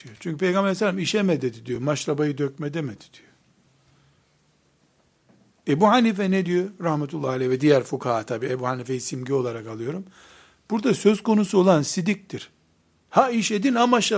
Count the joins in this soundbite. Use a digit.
0